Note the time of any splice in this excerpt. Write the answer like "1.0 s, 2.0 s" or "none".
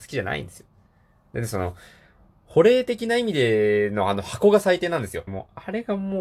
5.3 s